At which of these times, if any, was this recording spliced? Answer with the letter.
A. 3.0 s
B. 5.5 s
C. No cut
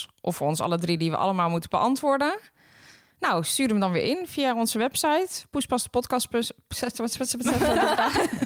C